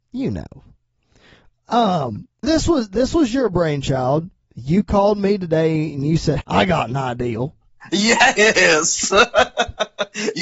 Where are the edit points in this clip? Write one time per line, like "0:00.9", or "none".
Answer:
0:02.4
0:06.4